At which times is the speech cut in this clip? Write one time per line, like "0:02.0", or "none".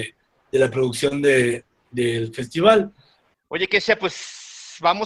0:03.3